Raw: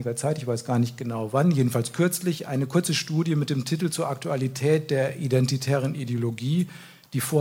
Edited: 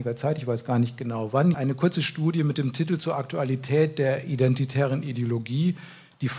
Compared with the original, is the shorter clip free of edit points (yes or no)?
no